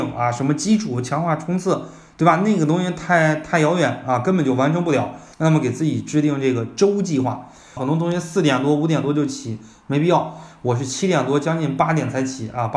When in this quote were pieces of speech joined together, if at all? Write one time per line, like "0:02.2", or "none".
0:05.3
0:07.8